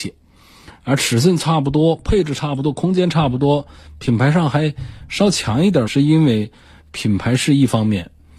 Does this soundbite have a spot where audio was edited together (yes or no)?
yes